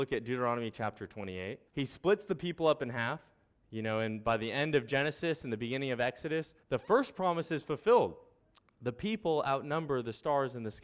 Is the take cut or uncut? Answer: cut